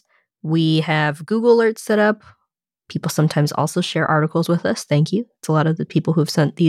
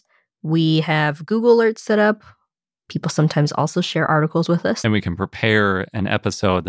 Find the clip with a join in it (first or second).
second